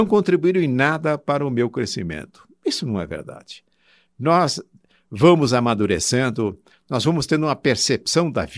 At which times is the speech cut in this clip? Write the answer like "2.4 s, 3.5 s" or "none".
none